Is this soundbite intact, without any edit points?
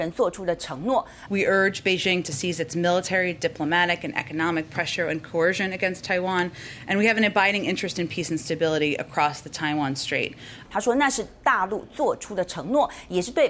no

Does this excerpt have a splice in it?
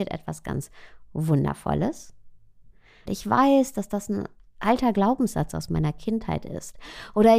yes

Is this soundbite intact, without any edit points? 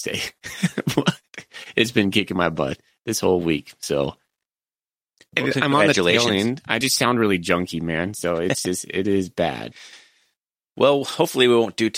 yes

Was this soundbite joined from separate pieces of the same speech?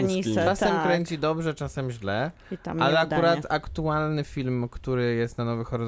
no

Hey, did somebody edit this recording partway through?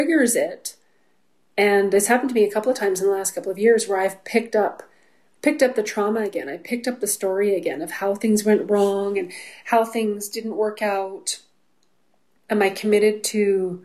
yes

